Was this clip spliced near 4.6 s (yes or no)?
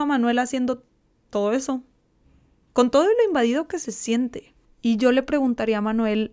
yes